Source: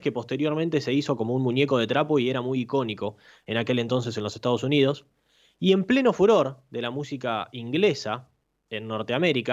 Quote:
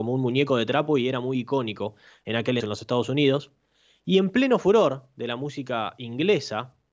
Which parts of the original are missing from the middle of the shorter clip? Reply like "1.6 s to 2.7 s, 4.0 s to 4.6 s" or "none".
3.8 s to 4.1 s